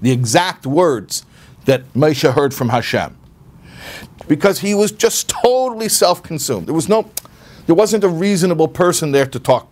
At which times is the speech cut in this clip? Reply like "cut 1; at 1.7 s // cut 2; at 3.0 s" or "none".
cut 1; at 4.2 s // cut 2; at 6.6 s